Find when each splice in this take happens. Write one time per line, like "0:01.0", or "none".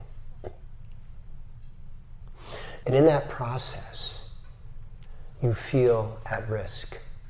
0:02.8